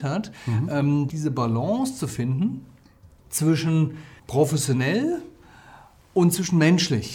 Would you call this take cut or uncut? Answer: cut